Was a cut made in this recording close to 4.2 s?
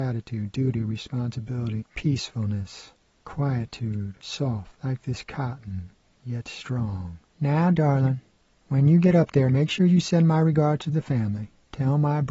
no; 1 cut; at 1.8 s

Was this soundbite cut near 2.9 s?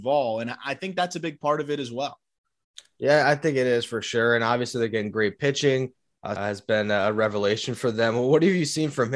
no; 1 cut; at 6.4 s

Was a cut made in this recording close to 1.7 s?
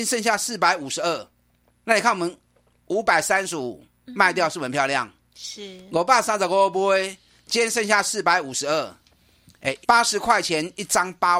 no; 1 cut; at 9.8 s

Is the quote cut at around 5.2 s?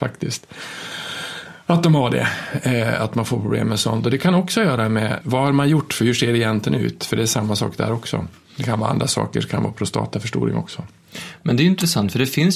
yes; 1 cut; at 5.2 s

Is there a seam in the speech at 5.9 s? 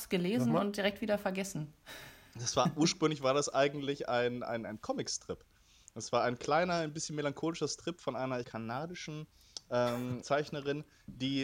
no; 2 cuts; at 8.4 s, 10.2 s

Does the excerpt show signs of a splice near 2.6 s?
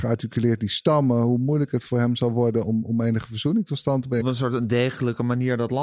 no; 1 cut; at 4.2 s

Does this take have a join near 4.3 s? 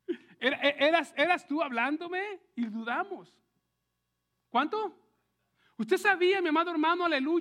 yes; 1 cut; at 4.3 s

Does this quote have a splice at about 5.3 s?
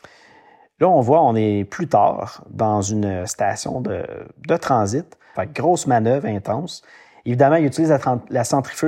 yes; 1 cut; at 5.3 s

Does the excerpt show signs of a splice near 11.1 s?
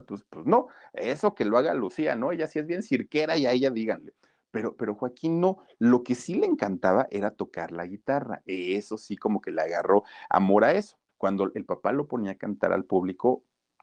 yes; 1 cut; at 11.1 s

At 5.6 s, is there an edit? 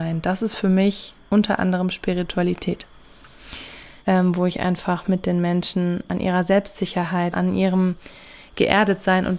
no; 2 cuts; at 4.0 s, 7.3 s

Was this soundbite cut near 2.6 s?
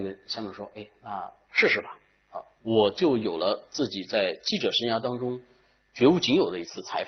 yes; 1 cut; at 2.6 s

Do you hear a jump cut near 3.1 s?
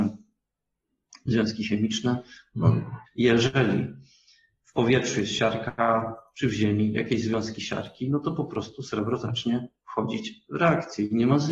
yes; 1 cut; at 3.1 s

